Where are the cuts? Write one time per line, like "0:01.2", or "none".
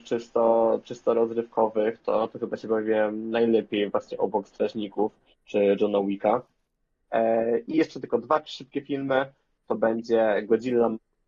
0:07.0